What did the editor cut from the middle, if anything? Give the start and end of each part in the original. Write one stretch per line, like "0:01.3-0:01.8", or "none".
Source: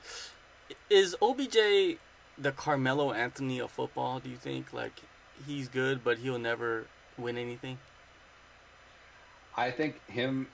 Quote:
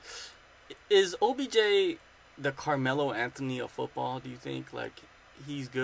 none